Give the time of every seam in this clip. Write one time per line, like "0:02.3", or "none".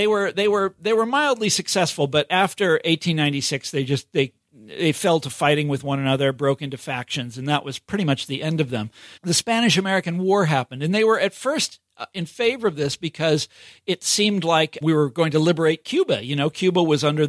0:09.2
0:14.8

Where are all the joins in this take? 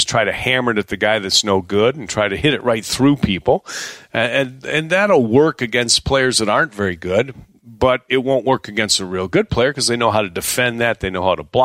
none

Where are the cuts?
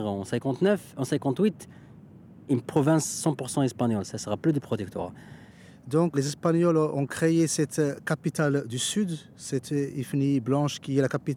0:06.1

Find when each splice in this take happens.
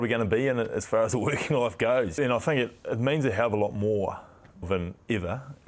0:02.2
0:04.6

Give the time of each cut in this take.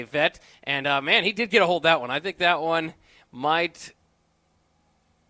none

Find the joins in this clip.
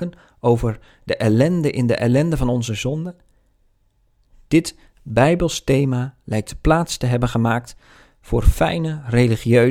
none

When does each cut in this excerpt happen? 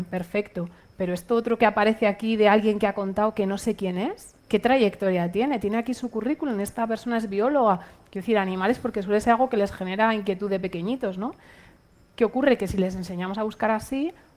0:04.4

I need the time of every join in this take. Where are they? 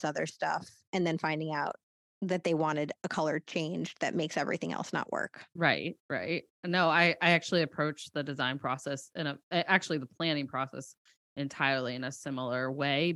none

